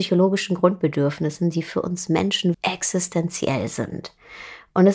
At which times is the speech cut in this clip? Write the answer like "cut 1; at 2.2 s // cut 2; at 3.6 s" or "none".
cut 1; at 2.5 s